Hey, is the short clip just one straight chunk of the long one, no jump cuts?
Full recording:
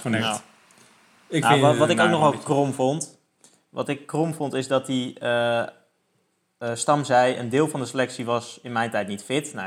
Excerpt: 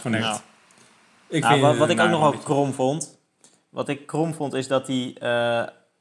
yes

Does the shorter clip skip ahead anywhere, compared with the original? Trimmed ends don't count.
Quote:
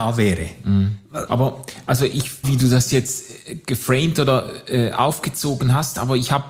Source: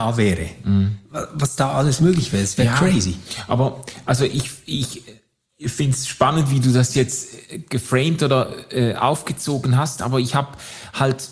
yes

